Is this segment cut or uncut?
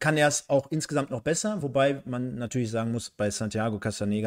uncut